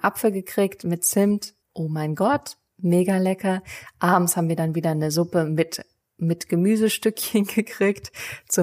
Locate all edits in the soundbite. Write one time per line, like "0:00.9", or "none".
0:01.6